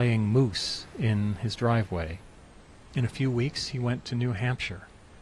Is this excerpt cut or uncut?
cut